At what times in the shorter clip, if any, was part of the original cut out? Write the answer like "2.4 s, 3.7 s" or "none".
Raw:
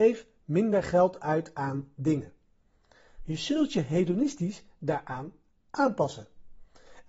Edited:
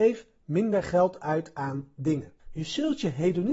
2.4 s